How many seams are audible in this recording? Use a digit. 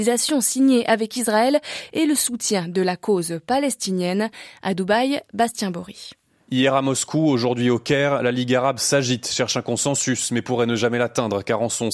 0